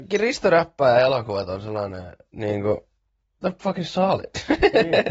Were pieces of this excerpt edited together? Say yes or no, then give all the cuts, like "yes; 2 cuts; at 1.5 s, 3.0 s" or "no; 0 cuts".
yes; 1 cut; at 3.6 s